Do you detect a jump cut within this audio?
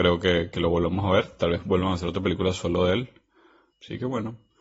yes; 1 cut; at 3.7 s

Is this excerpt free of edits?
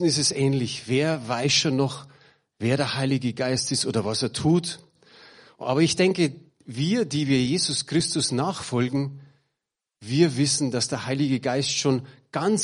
yes; 0 cuts

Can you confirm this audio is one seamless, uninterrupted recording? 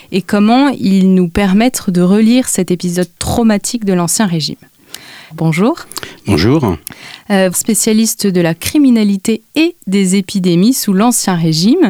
no; 2 cuts; at 5.3 s, 7.5 s

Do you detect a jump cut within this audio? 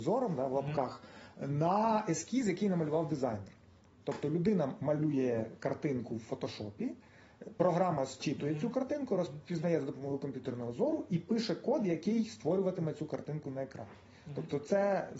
no; 0 cuts

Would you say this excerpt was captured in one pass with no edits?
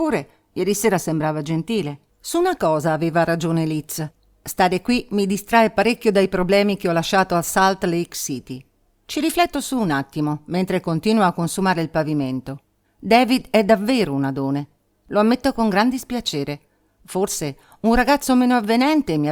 no; 2 cuts; at 2.1 s, 12.8 s

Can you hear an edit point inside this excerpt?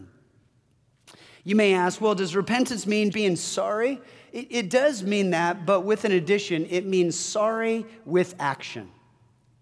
yes; 1 cut; at 3.1 s

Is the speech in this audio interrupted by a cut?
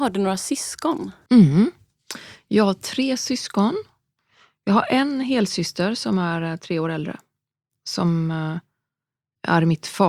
no; 0 cuts

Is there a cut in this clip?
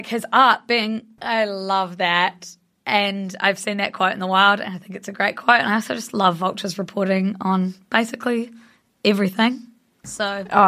yes; 1 cut; at 1.2 s

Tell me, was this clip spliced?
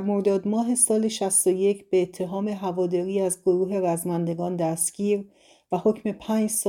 no; 0 cuts

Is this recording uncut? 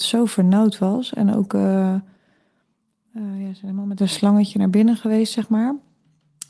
yes; 0 cuts

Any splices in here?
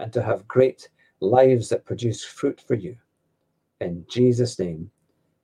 no; 0 cuts

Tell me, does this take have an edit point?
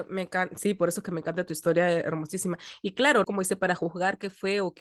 yes; 1 cut; at 3.2 s

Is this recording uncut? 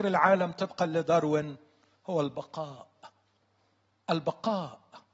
yes; 0 cuts

